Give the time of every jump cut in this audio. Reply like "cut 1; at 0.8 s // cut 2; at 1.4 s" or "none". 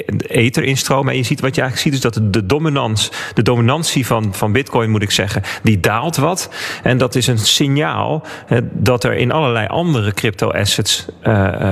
none